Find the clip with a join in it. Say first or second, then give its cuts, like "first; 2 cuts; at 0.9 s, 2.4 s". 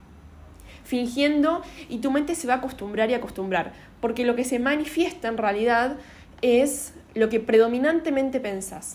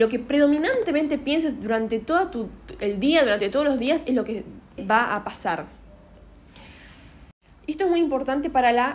second; 1 cut; at 4.8 s